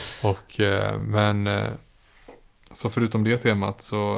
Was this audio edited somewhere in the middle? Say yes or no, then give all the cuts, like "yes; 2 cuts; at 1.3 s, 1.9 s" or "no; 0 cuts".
no; 0 cuts